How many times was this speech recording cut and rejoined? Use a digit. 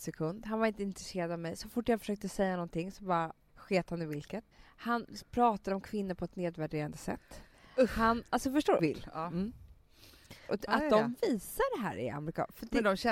3